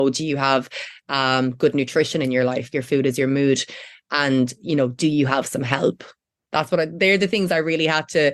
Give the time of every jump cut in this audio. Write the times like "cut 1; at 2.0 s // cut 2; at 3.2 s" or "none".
none